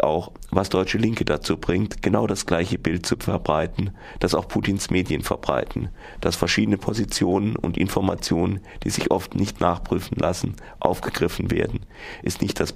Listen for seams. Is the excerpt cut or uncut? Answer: uncut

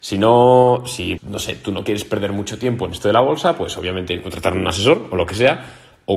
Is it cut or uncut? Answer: cut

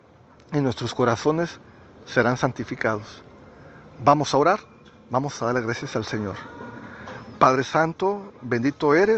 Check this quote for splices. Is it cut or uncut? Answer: uncut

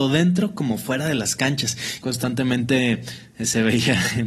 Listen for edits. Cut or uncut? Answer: cut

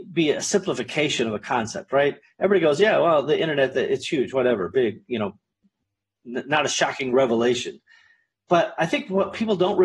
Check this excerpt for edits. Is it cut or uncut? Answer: uncut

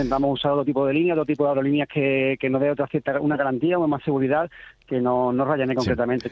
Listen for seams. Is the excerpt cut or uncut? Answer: uncut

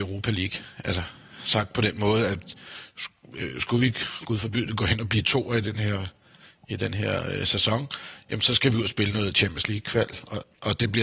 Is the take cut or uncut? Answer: uncut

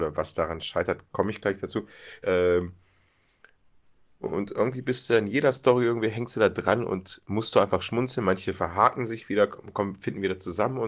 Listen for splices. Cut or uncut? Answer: cut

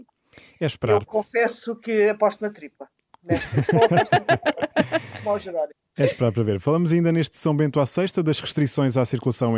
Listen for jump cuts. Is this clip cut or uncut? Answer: uncut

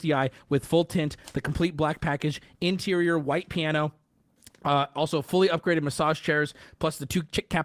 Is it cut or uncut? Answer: uncut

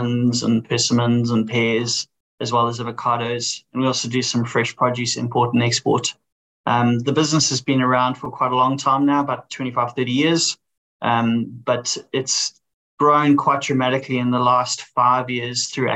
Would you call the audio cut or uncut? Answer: uncut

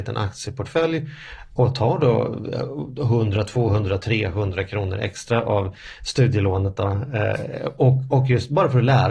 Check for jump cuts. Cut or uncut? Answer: uncut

